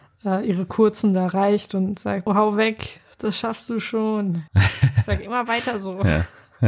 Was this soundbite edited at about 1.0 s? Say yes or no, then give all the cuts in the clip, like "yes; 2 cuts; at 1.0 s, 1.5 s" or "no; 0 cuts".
no; 2 cuts; at 2.3 s, 4.5 s